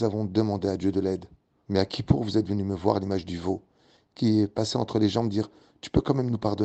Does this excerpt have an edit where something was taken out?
yes; 1 cut; at 1.6 s

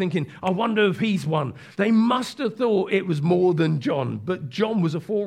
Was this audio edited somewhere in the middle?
yes; 1 cut; at 1.7 s

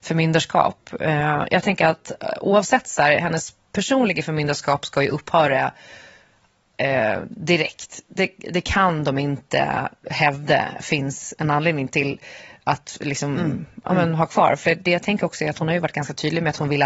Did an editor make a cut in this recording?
no; 0 cuts

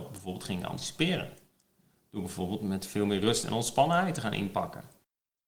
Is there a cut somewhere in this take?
no; 0 cuts

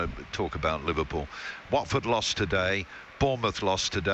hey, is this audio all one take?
no; 1 cut; at 1.6 s

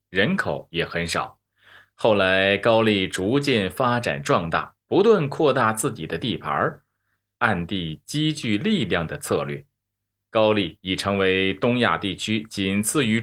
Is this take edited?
yes; 2 cuts; at 7.4 s, 10.3 s

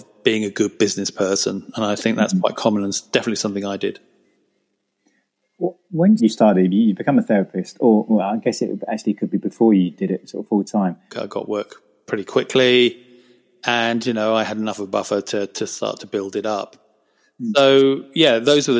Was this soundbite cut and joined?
yes; 2 cuts; at 6.2 s, 11.1 s

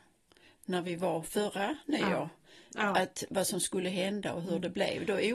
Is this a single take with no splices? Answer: yes; 0 cuts

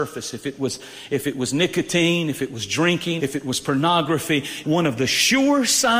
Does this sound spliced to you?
yes; 2 cuts; at 3.2 s, 4.6 s

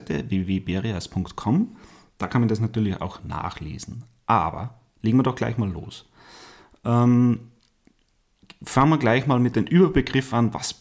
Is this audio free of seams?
yes; 0 cuts

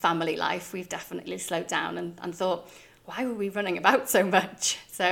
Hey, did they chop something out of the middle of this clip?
no; 0 cuts

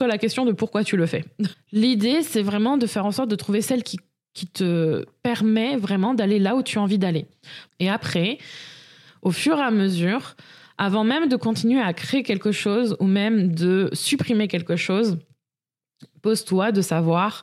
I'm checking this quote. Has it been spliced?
yes; 2 cuts; at 1.5 s, 7.7 s

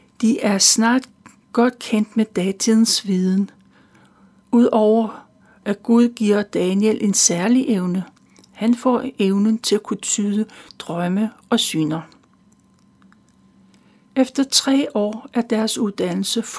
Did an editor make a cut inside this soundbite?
no; 0 cuts

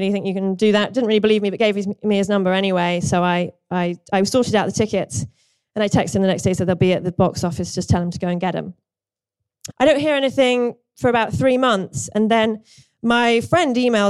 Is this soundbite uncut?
no; 1 cut; at 9.7 s

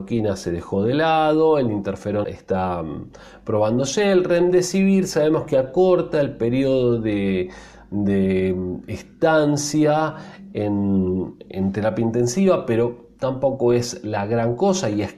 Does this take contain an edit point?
yes; 1 cut; at 2.2 s

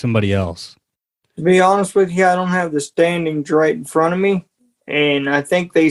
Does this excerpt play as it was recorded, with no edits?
yes; 0 cuts

